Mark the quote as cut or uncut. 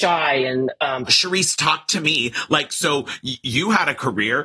cut